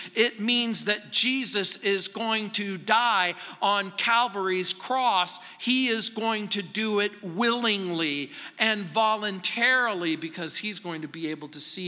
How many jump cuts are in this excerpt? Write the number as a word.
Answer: zero